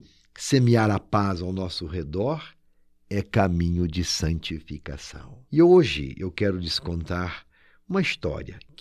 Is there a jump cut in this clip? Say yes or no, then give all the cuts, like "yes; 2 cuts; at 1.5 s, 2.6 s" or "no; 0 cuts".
yes; 1 cut; at 5.5 s